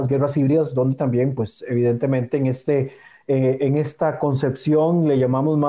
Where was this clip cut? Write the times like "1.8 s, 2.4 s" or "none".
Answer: none

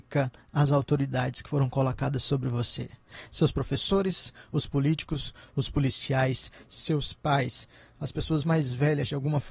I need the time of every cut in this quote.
none

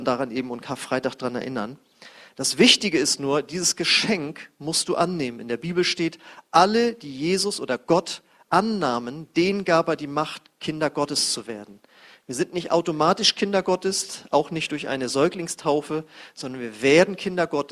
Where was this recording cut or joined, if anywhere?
none

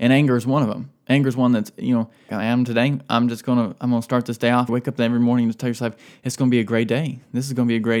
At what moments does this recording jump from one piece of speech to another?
2.3 s, 4.7 s

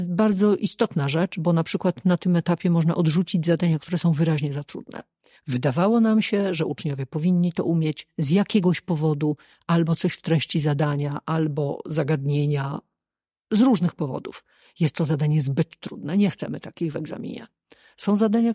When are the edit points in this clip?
none

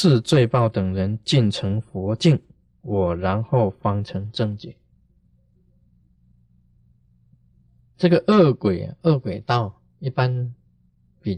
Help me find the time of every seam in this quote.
none

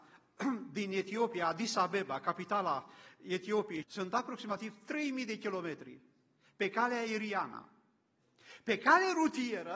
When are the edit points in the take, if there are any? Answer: 3.8 s

